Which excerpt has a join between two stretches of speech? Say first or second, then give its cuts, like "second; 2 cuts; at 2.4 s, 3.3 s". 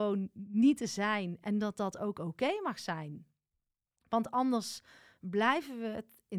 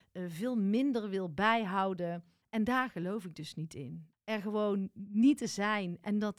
second; 2 cuts; at 2.4 s, 4.1 s